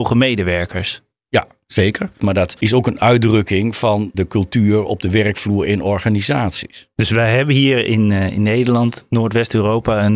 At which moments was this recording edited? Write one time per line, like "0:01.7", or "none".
0:02.2
0:04.1